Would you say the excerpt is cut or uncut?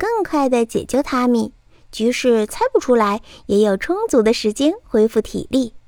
uncut